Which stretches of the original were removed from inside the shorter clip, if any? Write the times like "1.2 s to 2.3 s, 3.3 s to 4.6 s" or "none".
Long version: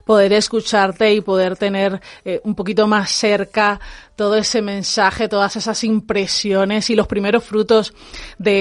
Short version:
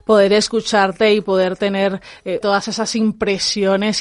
2.4 s to 5.3 s